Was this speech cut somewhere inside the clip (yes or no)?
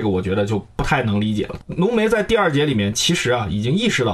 no